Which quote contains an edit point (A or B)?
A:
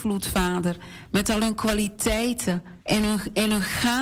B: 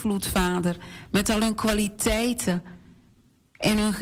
A